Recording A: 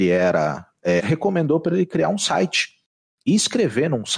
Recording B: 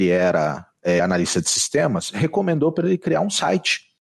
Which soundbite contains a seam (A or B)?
A